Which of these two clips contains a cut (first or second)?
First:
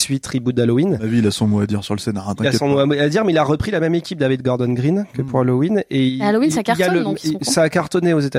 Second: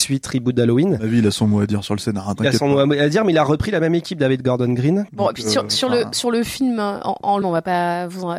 second